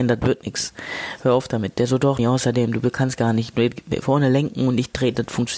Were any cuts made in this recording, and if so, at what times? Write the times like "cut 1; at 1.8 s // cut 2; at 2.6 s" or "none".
cut 1; at 2.2 s